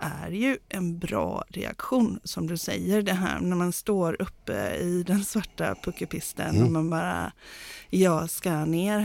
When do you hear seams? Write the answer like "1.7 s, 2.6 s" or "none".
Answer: none